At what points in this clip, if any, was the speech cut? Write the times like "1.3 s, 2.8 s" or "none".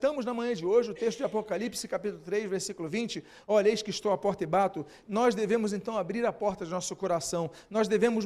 5.0 s